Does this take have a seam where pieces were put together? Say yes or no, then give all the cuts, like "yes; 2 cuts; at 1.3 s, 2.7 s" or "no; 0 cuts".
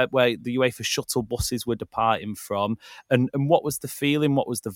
no; 0 cuts